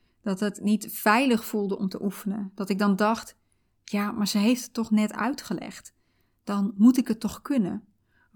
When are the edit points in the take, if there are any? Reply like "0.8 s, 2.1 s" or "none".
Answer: none